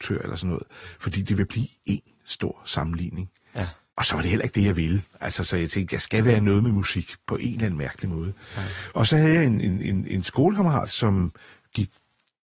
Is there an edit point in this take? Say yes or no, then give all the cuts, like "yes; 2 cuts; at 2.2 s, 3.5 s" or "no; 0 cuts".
no; 0 cuts